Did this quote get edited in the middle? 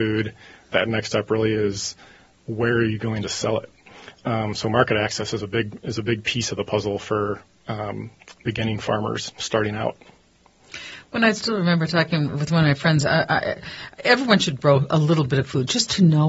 no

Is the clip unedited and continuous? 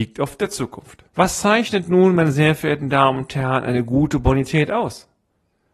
no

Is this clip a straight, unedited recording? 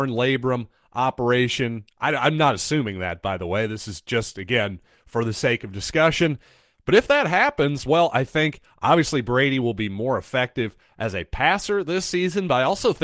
yes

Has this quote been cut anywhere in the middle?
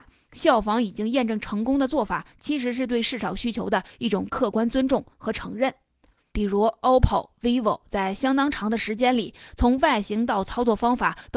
yes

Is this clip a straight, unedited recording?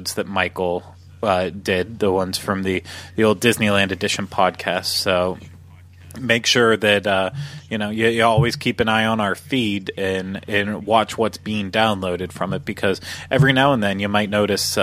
yes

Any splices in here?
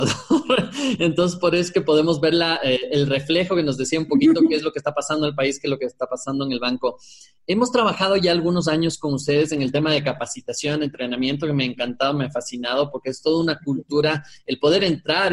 no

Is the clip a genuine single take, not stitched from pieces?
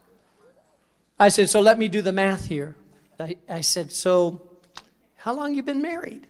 no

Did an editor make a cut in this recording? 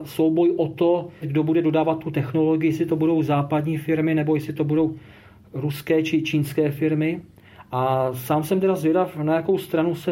yes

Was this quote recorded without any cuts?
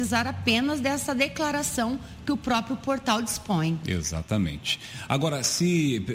no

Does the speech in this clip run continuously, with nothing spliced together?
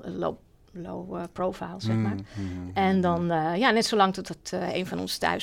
yes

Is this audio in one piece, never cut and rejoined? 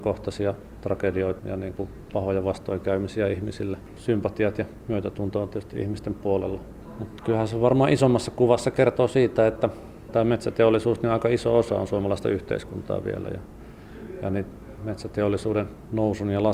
no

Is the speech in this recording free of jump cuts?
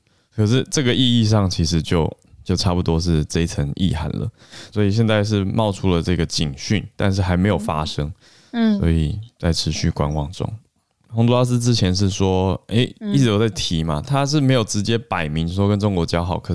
no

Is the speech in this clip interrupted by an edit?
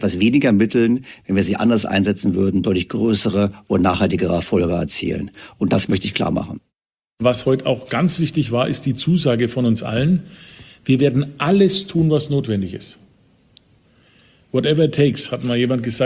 no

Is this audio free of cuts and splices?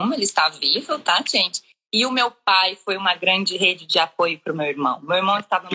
no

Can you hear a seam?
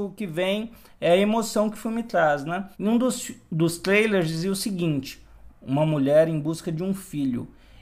yes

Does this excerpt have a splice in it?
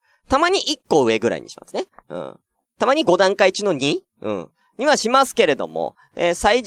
no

